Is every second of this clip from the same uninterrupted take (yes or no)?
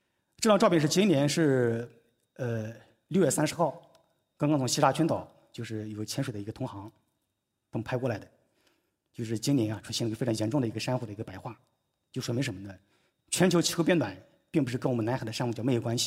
yes